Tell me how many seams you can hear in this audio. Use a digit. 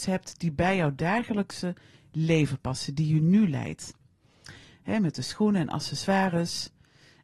1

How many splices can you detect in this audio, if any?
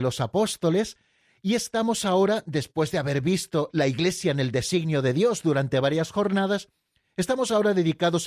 0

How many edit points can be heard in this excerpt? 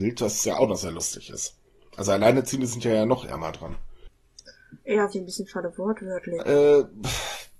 2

